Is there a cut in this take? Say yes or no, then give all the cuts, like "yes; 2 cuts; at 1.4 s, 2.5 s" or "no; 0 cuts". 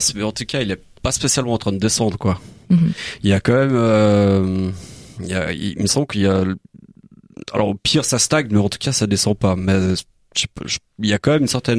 no; 0 cuts